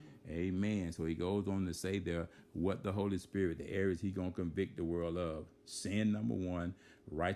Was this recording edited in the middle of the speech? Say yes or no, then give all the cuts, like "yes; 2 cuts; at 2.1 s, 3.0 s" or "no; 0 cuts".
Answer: no; 0 cuts